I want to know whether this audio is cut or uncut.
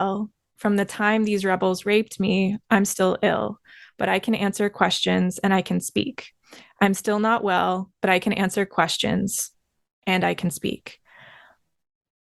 uncut